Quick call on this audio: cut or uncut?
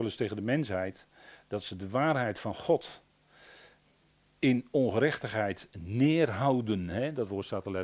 uncut